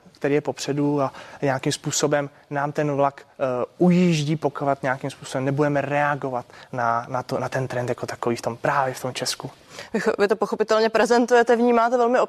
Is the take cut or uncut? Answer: uncut